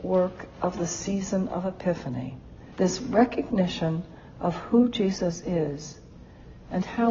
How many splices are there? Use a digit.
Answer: 1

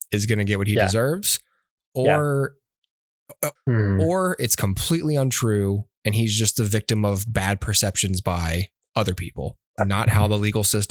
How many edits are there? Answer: 2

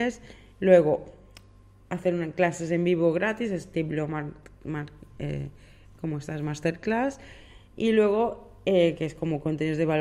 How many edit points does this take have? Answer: 0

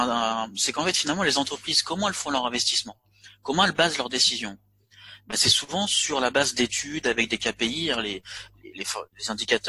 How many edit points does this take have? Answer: 0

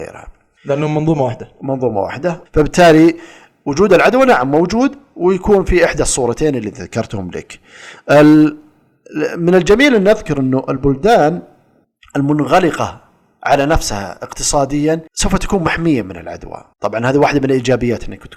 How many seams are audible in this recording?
2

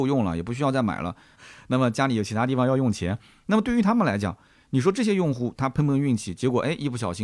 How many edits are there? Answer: 1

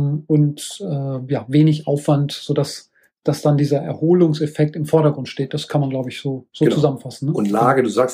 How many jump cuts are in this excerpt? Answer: 0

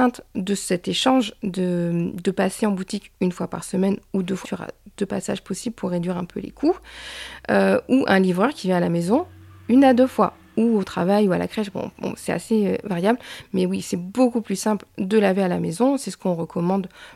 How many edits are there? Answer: 1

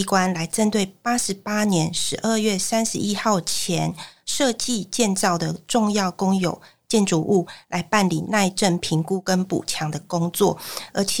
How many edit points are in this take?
0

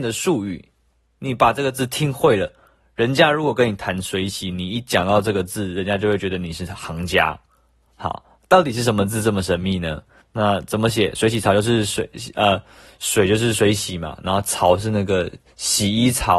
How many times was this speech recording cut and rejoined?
1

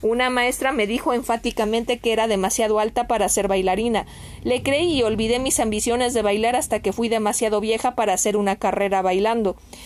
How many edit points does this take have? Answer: 0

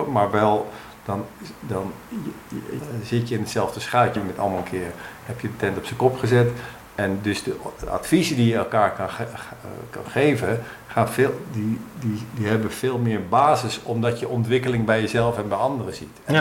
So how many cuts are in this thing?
2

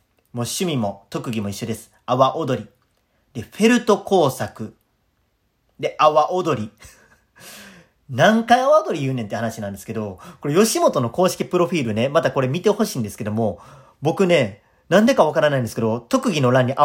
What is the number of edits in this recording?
0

